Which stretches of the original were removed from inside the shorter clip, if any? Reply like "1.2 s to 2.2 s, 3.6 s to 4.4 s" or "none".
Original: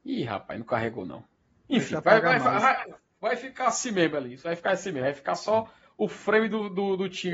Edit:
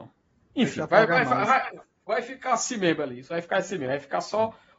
none